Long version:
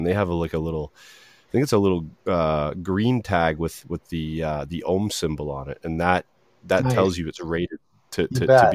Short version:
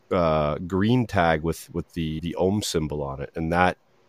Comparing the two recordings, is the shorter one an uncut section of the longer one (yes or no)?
no